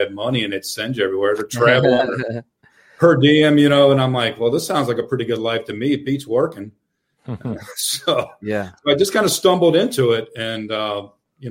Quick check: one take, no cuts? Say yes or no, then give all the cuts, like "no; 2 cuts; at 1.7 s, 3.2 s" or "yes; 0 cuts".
yes; 0 cuts